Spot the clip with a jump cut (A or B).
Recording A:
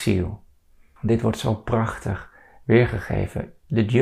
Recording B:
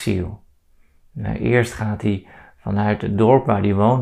A